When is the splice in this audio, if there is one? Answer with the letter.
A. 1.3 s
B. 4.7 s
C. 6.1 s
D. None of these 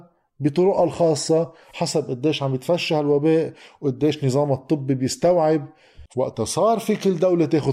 C